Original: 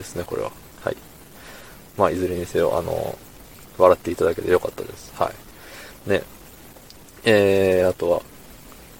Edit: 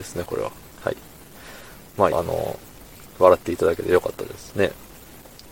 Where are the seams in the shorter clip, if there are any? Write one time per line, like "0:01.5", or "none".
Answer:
0:02.1
0:04.5